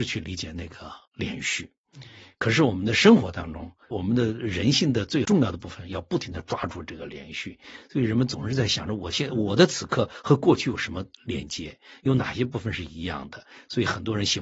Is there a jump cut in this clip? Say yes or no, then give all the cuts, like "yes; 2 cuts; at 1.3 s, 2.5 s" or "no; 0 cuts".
yes; 1 cut; at 1.1 s